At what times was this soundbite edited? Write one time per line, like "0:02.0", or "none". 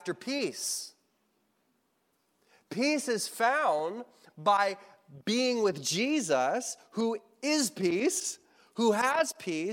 none